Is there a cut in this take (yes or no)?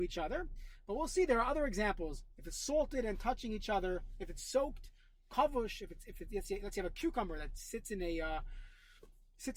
no